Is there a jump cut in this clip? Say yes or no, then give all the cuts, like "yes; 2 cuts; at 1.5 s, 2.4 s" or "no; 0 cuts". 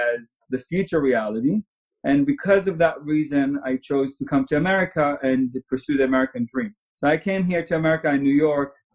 no; 0 cuts